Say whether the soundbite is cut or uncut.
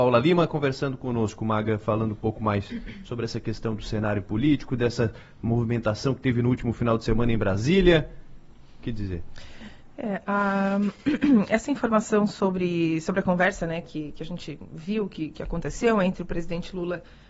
uncut